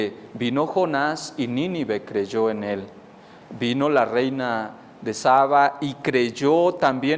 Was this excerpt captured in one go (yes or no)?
yes